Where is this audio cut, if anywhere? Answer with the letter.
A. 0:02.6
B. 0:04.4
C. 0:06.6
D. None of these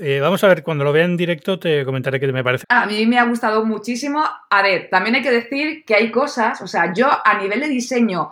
A